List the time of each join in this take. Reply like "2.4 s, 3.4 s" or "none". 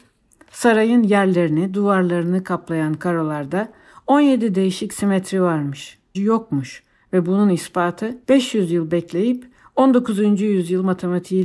6.1 s, 8.2 s